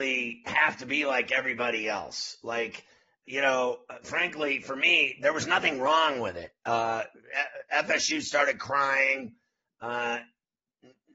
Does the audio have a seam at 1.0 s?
no; 1 cut; at 3.2 s

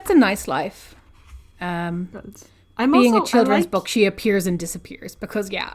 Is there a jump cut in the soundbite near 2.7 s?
no; 0 cuts

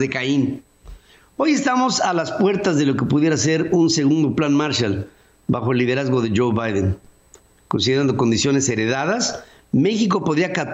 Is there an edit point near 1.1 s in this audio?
no; 0 cuts

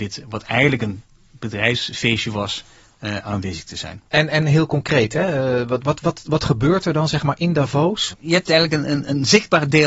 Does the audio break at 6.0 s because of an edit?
no; 2 cuts; at 4.1 s, 8.1 s

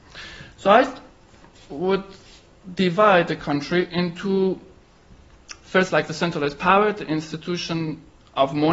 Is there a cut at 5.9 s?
no; 0 cuts

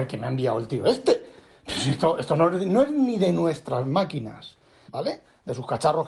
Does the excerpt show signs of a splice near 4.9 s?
yes; 2 cuts; at 2.2 s, 4.9 s

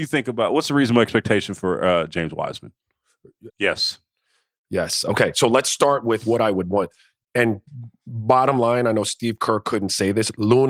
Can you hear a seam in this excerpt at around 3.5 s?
yes; 1 cut; at 3.5 s

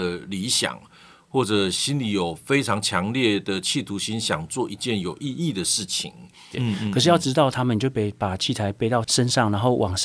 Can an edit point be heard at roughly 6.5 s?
yes; 1 cut; at 6.5 s

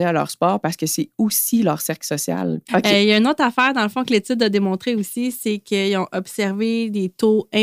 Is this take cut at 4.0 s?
no; 1 cut; at 2.7 s

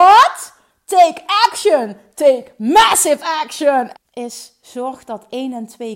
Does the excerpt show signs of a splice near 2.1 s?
yes; 2 cuts; at 2.1 s, 3.9 s

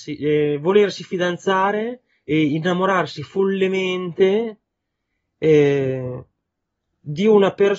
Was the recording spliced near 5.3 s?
no; 0 cuts

